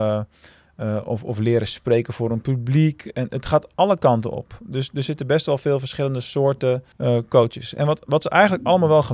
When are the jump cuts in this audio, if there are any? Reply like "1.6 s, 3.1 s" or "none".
6.9 s